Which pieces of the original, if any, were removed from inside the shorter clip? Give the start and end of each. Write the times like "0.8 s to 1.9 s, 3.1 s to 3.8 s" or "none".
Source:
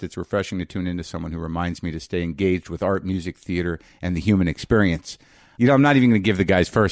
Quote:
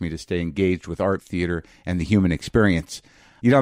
3.0 s to 3.3 s